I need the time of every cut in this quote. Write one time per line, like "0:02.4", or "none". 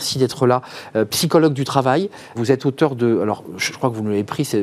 0:02.3